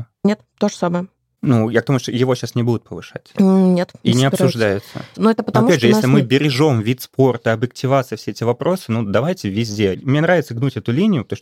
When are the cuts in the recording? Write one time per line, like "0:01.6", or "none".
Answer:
0:05.1
0:09.9